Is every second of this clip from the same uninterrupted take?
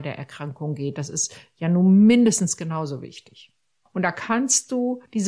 yes; 0 cuts

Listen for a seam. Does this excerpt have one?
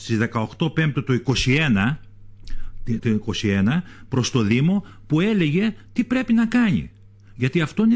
yes; 1 cut; at 3.0 s

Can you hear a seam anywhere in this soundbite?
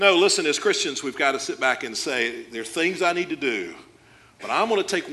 no; 0 cuts

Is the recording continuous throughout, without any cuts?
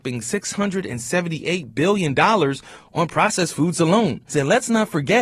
no; 1 cut; at 4.3 s

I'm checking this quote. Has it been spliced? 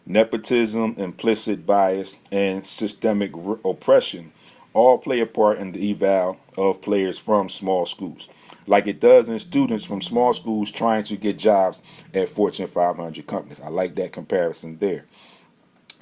no; 0 cuts

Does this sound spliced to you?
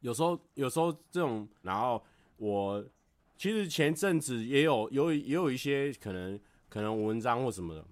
yes; 1 cut; at 1.6 s

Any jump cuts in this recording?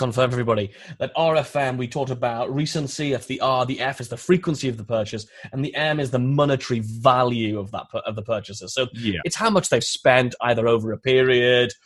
yes; 1 cut; at 9.2 s

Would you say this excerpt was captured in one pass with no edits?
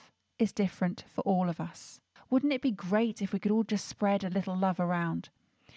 no; 1 cut; at 2.2 s

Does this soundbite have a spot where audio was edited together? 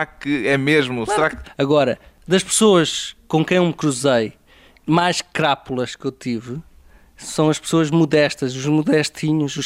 yes; 1 cut; at 1.4 s

